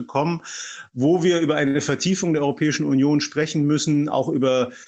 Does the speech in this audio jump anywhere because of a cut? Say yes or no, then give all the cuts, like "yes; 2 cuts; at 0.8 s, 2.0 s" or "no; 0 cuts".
no; 0 cuts